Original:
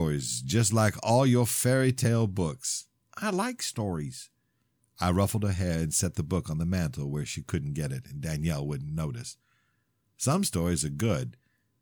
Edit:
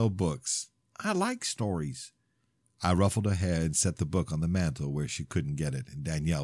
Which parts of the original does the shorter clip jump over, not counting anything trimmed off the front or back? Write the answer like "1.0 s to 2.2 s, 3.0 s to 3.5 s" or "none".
none